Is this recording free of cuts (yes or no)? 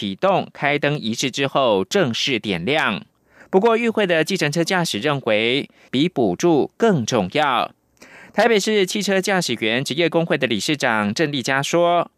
no